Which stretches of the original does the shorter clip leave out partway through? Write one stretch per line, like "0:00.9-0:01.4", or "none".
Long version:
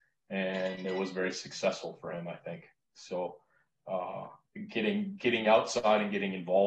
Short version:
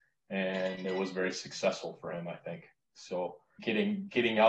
0:03.6-0:04.7